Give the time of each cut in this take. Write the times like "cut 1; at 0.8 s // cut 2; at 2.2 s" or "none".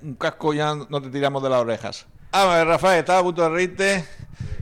cut 1; at 2.3 s